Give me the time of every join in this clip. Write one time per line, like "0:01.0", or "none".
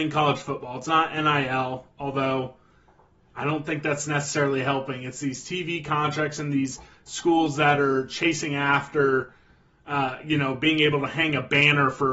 none